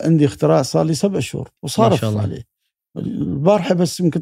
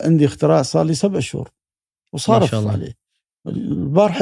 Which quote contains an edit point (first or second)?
first